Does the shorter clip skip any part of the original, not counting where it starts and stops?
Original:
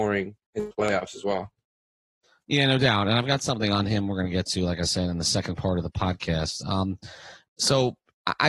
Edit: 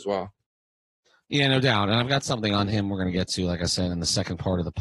no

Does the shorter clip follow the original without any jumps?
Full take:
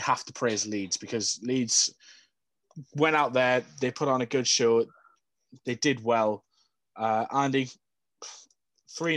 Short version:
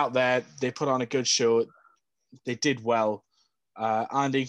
yes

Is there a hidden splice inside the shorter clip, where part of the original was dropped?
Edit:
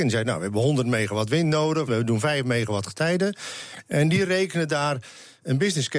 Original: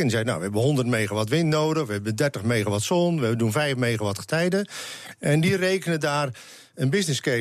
yes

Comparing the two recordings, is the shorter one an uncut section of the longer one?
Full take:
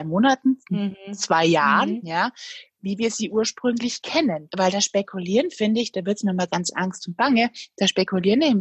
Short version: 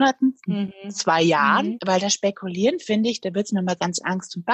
no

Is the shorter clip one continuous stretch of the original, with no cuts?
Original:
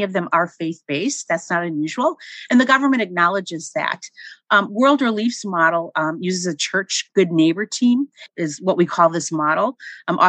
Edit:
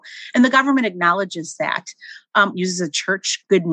no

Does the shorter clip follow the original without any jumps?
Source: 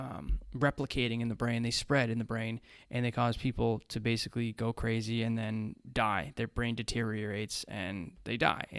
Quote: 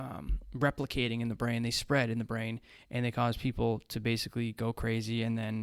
yes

